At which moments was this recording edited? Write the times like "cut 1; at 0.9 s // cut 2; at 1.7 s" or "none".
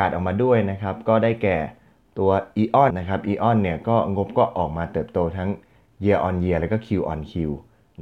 cut 1; at 2.9 s